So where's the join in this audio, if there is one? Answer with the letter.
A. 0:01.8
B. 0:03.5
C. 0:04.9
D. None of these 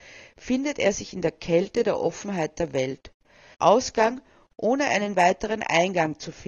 B